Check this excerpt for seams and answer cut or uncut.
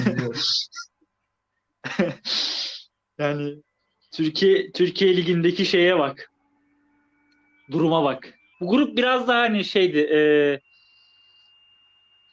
cut